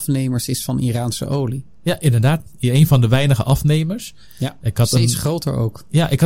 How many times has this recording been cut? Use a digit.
1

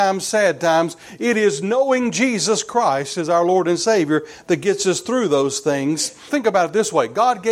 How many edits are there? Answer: 1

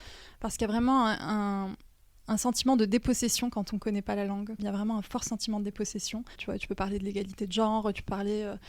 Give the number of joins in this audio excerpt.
2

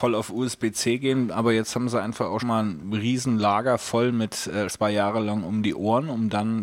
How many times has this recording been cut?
2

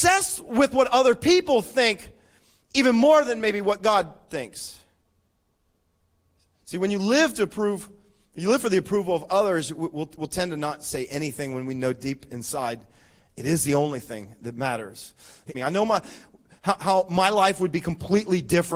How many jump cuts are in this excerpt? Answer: 1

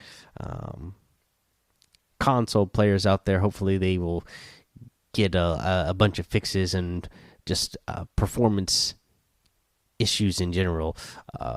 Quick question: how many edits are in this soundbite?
0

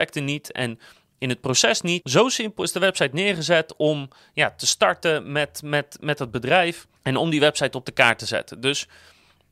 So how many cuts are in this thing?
2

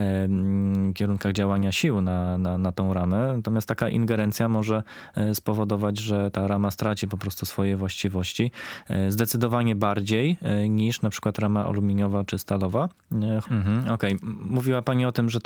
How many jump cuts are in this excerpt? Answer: 2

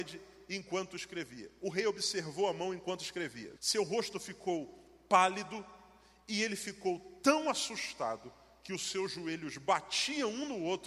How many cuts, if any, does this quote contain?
1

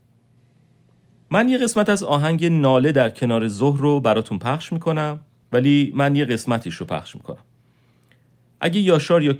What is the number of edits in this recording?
1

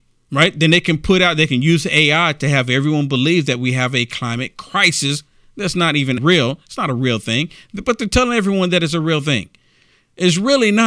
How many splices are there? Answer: 1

